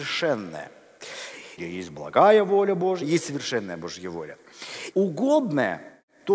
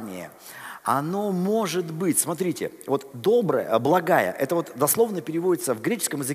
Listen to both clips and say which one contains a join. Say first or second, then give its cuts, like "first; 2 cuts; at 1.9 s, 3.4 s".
first; 3 cuts; at 1.6 s, 3.0 s, 4.9 s